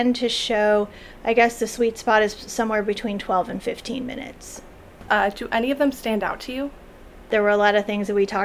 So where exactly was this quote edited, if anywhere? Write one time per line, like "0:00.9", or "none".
0:05.1
0:07.3